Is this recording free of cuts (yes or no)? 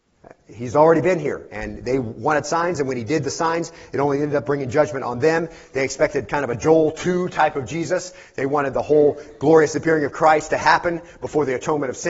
yes